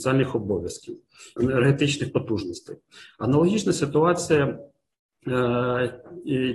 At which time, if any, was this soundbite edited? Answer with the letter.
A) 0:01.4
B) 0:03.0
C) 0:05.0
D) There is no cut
A